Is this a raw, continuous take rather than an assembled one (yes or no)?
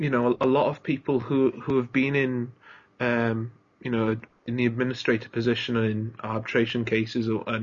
yes